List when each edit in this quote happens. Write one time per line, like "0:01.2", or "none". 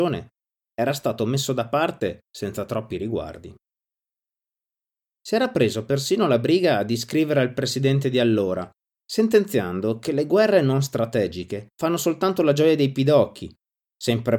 0:09.0
0:11.7